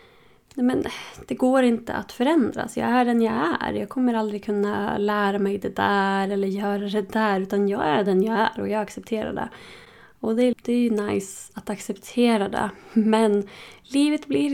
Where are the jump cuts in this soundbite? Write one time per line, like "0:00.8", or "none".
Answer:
0:10.5